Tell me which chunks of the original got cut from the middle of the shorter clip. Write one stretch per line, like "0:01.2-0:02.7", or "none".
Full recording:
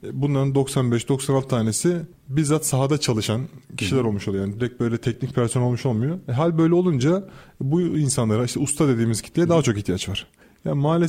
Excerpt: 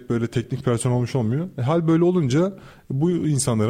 none